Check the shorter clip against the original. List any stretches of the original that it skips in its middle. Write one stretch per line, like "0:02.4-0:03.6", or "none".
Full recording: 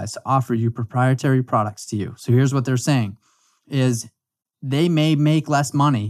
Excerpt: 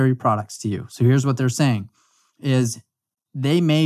none